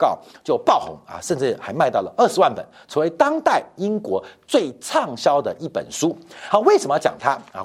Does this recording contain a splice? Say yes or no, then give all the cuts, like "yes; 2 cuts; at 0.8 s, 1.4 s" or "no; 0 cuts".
no; 0 cuts